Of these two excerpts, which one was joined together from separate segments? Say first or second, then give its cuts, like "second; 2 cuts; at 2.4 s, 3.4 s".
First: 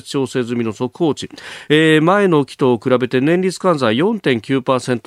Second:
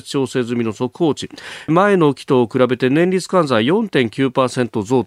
second; 1 cut; at 1.7 s